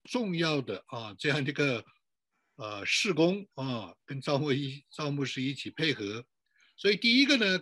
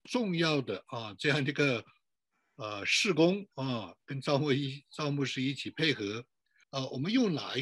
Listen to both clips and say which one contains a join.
second; 1 cut; at 6.6 s

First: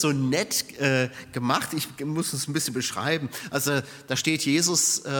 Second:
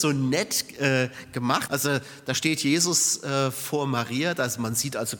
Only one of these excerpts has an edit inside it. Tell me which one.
second; 1 cut; at 1.7 s

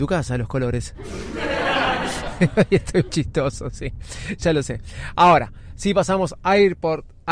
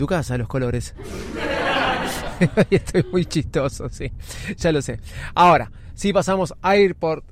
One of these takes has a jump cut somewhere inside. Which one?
first; 1 cut; at 3.1 s

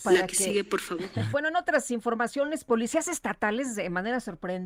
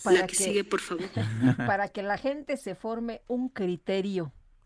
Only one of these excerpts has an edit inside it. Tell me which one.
first; 1 cut; at 1.3 s

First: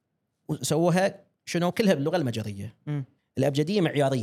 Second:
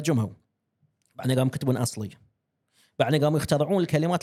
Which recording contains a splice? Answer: first; 1 cut; at 3.2 s

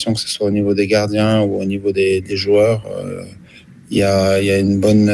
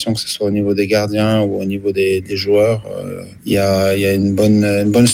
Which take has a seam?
second; 1 cut; at 3.4 s

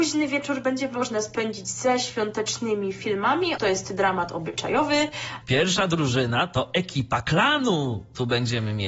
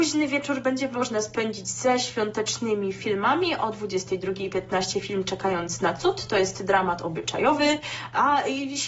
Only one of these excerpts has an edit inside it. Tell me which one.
first; 2 cuts; at 3.6 s, 5.4 s

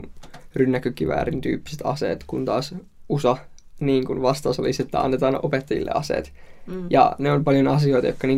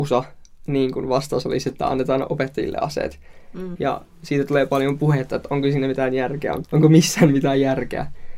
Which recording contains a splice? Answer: second; 2 cuts; at 3.8 s, 6.6 s

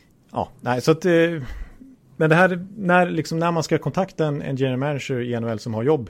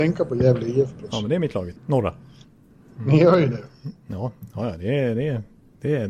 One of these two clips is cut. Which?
second; 1 cut; at 1.8 s

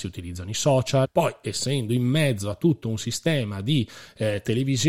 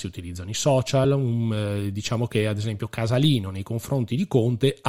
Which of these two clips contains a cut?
first; 1 cut; at 1.0 s

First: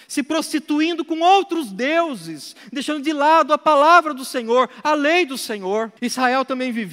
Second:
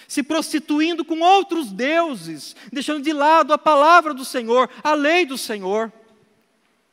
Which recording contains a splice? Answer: first; 1 cut; at 6.0 s

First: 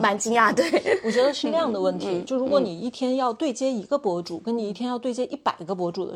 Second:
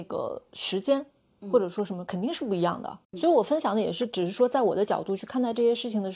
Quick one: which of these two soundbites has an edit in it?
second; 1 cut; at 3.0 s

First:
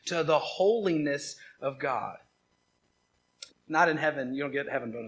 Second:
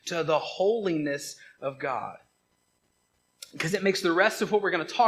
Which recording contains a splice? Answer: first; 1 cut; at 3.5 s

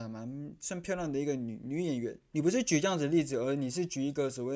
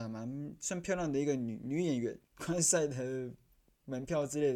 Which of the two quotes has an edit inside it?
second; 1 cut; at 2.2 s

